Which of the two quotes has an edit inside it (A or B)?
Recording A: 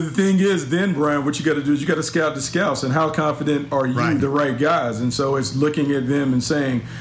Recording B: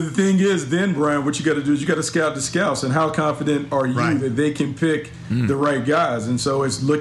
A